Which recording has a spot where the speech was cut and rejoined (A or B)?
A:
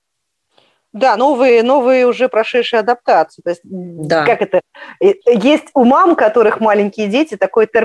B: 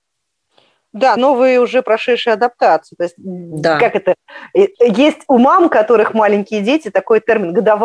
B